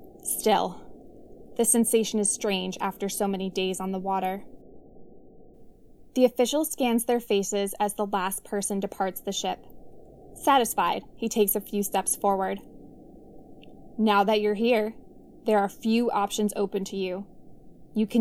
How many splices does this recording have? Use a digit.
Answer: 0